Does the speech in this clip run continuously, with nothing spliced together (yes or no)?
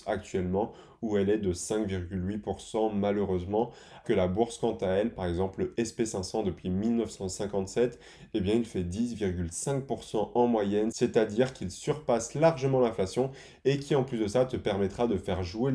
no